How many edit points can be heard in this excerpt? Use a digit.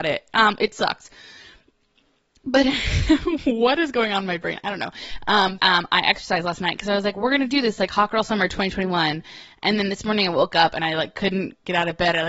1